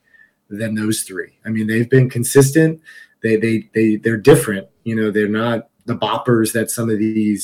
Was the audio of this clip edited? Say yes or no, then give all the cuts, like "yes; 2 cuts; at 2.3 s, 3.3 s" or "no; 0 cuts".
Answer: no; 0 cuts